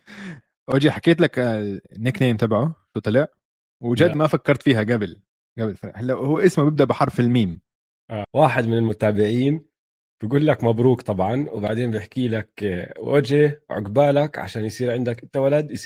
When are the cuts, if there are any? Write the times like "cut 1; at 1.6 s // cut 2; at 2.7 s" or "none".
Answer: cut 1; at 8.2 s